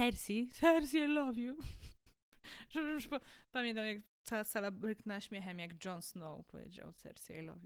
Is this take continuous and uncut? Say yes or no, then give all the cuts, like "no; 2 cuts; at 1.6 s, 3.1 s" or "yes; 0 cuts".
yes; 0 cuts